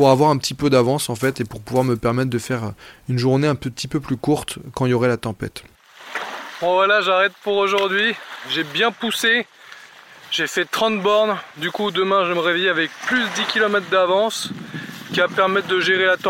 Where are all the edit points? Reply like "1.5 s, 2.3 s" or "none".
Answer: none